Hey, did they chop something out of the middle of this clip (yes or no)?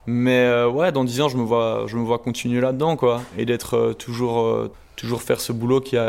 yes